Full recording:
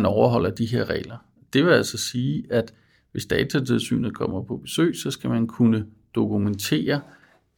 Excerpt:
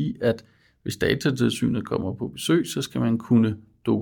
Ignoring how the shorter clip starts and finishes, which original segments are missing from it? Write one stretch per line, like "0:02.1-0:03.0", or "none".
none